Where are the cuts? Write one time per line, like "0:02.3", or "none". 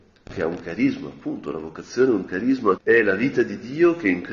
0:02.8